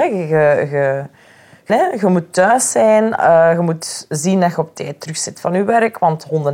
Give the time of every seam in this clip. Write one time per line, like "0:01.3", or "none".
0:01.7

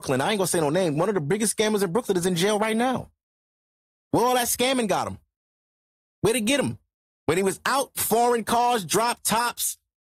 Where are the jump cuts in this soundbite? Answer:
none

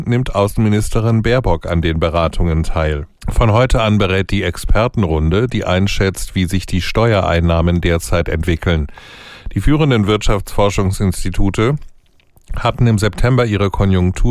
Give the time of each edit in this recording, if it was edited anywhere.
0:03.1

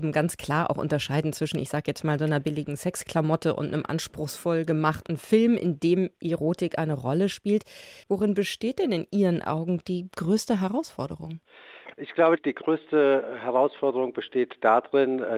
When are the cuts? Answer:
0:08.0

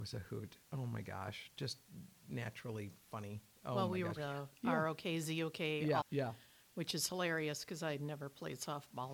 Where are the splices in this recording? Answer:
0:04.2
0:06.0

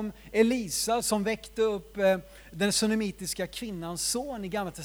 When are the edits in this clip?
0:01.0

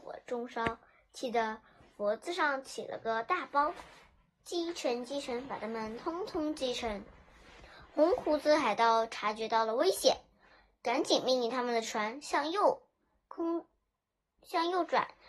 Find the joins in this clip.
none

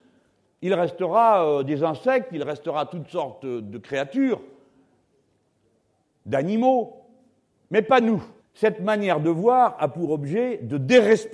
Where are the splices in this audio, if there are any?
0:08.4

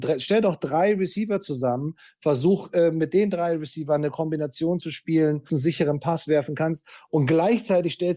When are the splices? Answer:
0:05.5

